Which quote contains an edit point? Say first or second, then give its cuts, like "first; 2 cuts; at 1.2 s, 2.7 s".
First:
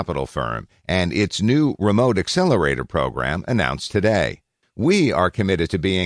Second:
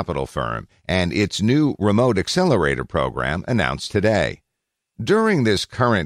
first; 1 cut; at 4.6 s